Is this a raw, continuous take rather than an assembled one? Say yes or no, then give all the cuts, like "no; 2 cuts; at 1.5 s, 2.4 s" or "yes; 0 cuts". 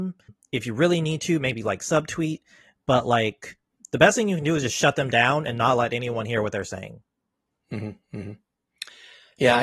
yes; 0 cuts